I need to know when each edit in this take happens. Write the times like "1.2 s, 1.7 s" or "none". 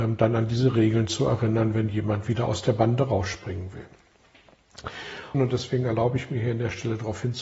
5.3 s